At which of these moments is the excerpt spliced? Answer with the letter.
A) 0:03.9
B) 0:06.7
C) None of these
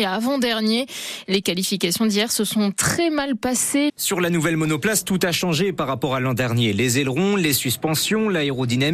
A